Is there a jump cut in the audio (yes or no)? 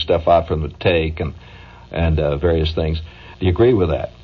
yes